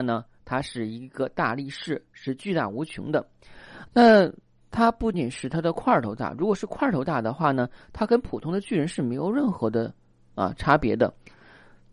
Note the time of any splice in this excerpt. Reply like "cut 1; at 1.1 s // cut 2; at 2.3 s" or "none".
cut 1; at 3.9 s // cut 2; at 5.1 s

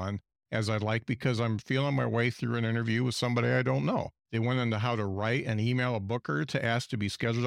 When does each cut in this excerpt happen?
cut 1; at 4.2 s

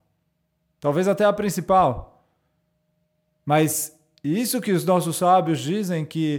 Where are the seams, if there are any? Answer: none

